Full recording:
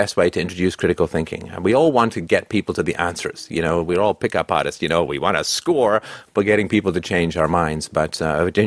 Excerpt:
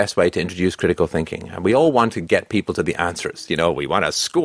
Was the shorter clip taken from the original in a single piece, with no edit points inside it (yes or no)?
no